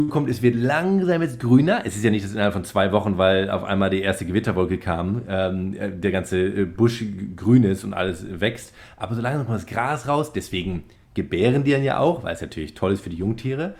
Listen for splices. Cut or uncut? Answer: uncut